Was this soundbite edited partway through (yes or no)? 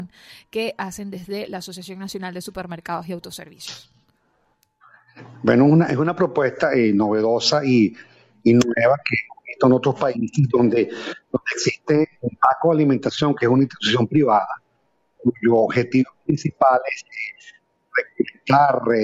yes